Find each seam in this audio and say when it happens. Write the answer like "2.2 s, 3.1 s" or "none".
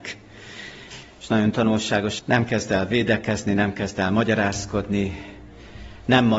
1.0 s, 2.2 s